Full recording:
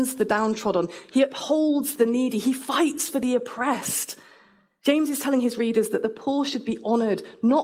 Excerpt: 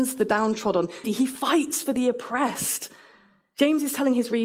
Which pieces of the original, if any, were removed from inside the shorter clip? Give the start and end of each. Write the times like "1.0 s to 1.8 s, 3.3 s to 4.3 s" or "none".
1.0 s to 2.3 s

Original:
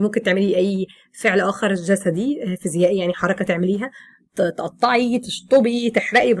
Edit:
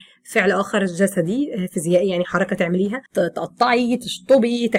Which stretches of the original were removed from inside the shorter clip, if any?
3.9 s to 4.3 s

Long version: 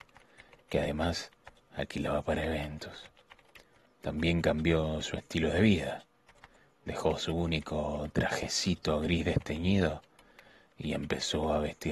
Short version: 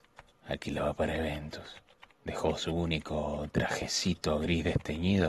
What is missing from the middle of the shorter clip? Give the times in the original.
3.4 s to 6.7 s

